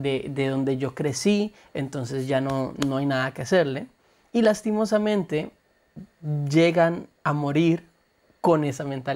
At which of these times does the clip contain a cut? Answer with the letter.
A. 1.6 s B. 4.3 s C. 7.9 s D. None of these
D